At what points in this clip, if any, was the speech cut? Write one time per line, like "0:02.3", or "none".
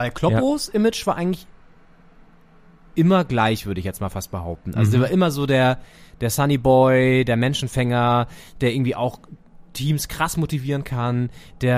none